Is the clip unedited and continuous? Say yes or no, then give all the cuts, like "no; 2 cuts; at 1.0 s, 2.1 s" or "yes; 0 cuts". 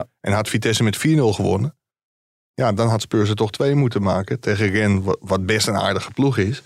yes; 0 cuts